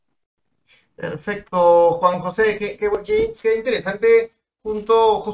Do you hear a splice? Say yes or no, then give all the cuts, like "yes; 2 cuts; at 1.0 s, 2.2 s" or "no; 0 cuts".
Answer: no; 0 cuts